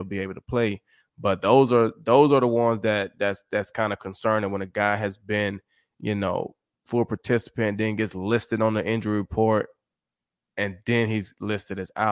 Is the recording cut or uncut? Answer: uncut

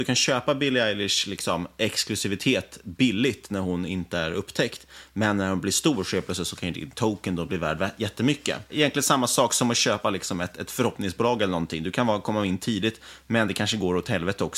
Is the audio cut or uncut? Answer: uncut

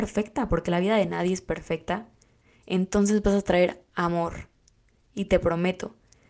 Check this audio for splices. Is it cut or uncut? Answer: uncut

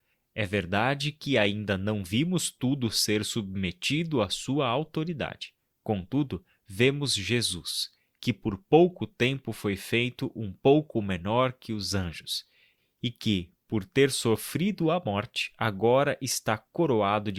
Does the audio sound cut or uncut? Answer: uncut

